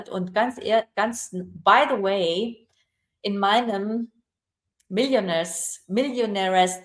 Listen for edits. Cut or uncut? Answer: uncut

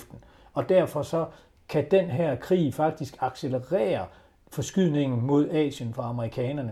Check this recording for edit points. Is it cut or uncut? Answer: uncut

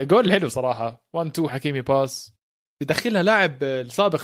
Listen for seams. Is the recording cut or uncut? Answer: cut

